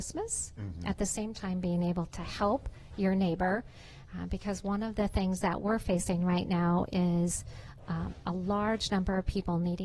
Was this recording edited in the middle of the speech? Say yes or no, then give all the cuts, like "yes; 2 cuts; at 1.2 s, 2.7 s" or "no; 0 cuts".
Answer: no; 0 cuts